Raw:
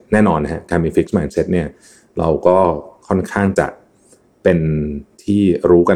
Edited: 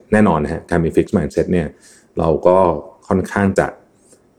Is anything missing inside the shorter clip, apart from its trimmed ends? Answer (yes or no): no